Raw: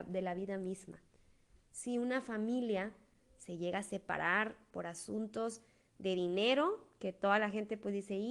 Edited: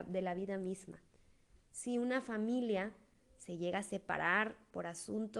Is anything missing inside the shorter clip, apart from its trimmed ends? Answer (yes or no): no